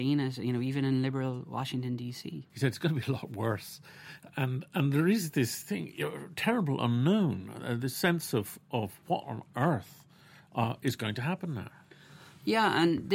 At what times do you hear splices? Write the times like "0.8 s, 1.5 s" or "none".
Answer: 2.5 s

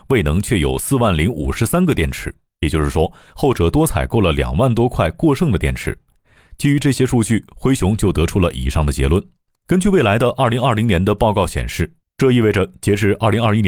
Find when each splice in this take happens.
9.6 s, 12.0 s

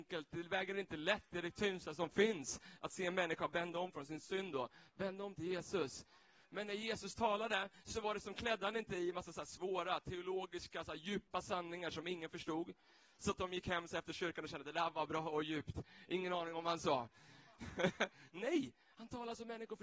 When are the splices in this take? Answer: none

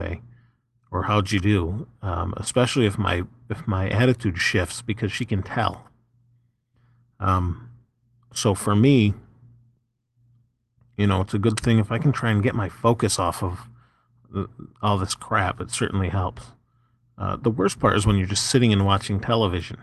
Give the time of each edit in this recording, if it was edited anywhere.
none

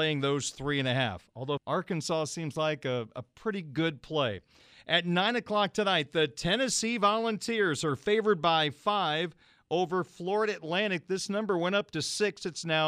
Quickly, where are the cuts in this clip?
1.6 s

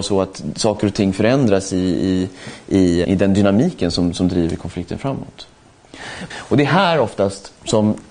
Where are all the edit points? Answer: 3.0 s, 6.3 s

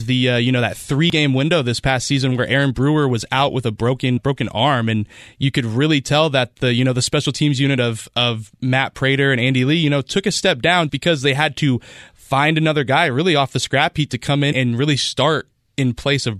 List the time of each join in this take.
4.2 s, 10.9 s, 14.5 s

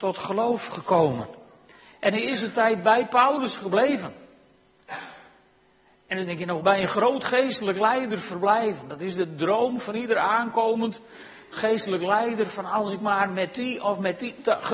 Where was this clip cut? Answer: 6.6 s

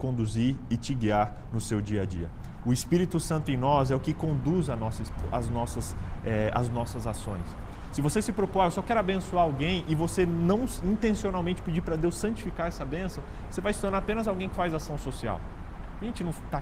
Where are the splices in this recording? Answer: 5.1 s

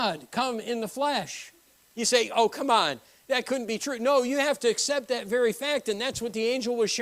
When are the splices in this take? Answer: 1.8 s

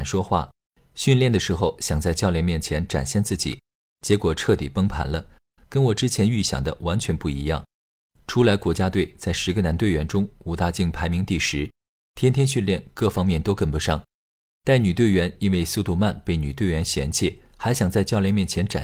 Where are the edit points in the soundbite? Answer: none

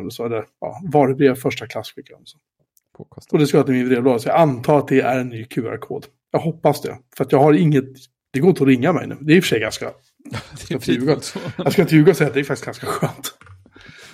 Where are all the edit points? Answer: none

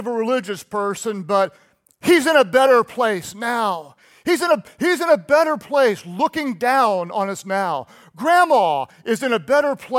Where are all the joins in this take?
none

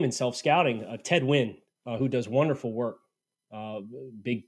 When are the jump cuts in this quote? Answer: none

